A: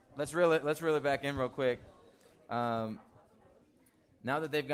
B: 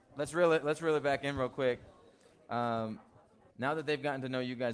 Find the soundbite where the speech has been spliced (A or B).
B